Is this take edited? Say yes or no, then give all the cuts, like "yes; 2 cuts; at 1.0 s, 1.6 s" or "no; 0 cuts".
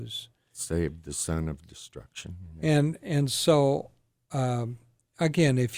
no; 0 cuts